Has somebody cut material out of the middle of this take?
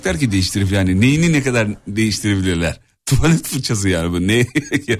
no; 0 cuts

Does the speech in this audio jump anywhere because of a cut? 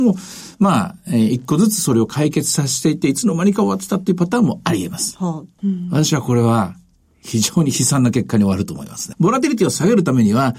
yes; 2 cuts; at 5.6 s, 9.1 s

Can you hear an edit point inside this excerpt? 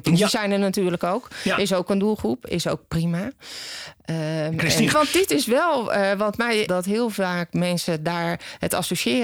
yes; 2 cuts; at 4.9 s, 6.7 s

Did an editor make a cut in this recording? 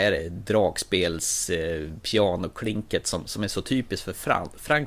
no; 0 cuts

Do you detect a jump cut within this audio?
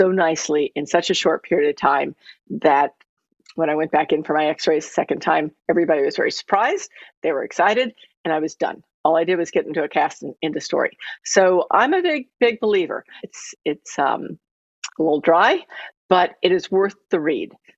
yes; 1 cut; at 13.2 s

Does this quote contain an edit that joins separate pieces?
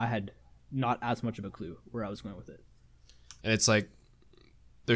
yes; 1 cut; at 3.4 s

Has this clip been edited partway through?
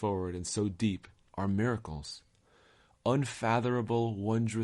yes; 1 cut; at 1.3 s

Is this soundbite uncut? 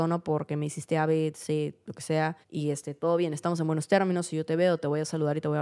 no; 1 cut; at 2.4 s

